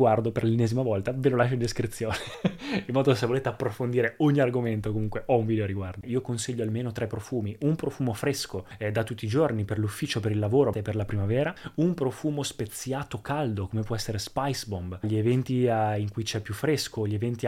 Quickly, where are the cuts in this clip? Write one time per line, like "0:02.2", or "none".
0:06.0
0:10.7
0:15.0